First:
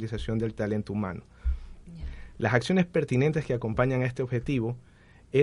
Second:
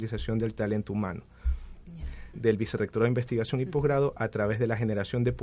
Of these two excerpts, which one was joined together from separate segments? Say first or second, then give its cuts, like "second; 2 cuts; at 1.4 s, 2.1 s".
second; 1 cut; at 2.3 s